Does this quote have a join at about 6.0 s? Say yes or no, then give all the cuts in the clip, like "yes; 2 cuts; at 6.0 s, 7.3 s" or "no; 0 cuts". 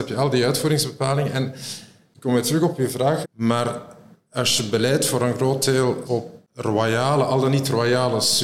yes; 2 cuts; at 3.2 s, 6.0 s